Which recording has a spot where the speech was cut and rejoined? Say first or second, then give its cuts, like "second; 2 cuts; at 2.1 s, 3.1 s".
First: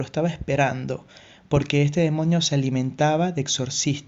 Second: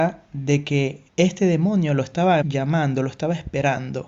second; 2 cuts; at 1.1 s, 2.4 s